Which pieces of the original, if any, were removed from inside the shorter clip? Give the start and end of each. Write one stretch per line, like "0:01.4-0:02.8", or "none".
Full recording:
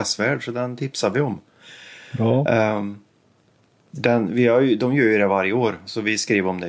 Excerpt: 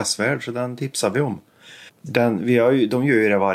0:01.9-0:03.8